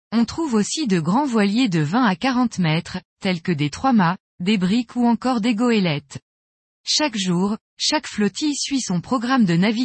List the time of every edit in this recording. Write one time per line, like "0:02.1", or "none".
none